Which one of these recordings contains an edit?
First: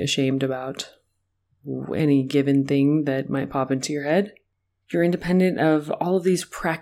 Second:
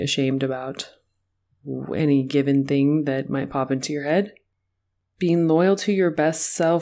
first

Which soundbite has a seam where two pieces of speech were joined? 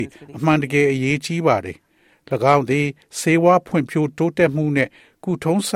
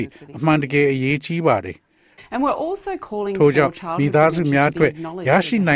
second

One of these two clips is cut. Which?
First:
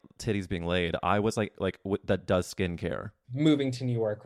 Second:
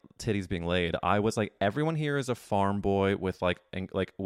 first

